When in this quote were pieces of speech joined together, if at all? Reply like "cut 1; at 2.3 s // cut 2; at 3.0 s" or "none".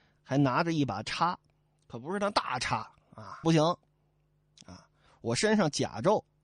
cut 1; at 3.4 s